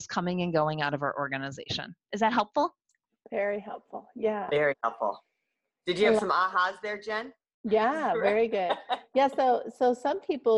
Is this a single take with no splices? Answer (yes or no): yes